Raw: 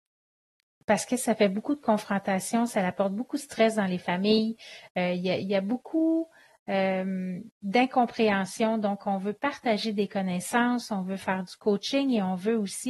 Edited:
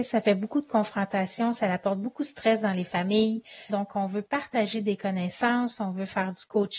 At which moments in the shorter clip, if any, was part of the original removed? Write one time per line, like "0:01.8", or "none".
0:03.7